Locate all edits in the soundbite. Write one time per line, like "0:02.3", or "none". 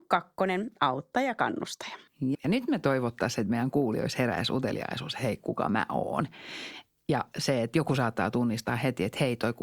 0:02.3